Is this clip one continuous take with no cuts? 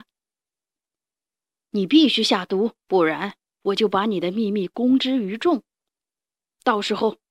no; 1 cut; at 2.8 s

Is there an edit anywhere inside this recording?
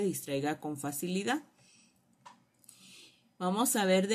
no; 0 cuts

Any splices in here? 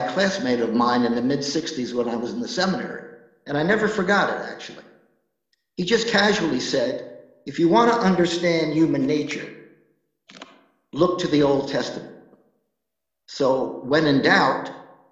yes; 1 cut; at 13.1 s

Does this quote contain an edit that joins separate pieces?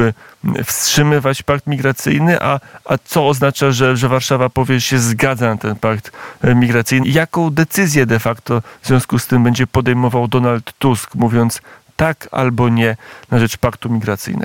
yes; 1 cut; at 7.0 s

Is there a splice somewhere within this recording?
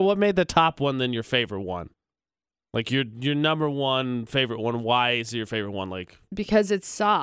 no; 0 cuts

